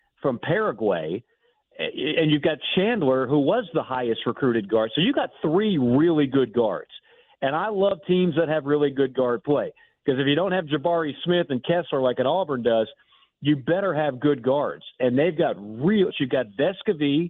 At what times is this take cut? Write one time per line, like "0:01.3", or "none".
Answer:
0:01.7
0:16.1